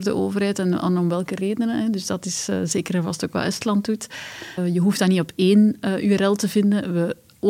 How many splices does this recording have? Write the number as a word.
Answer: one